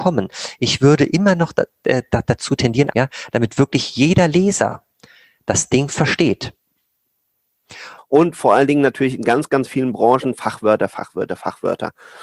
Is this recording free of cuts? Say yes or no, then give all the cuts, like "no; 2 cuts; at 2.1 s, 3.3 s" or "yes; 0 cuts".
no; 2 cuts; at 2.9 s, 8.0 s